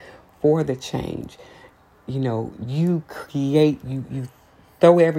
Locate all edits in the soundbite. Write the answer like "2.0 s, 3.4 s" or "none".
none